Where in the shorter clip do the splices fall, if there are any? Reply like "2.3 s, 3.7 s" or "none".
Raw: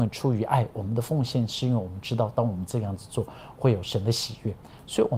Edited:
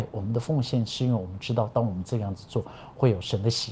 none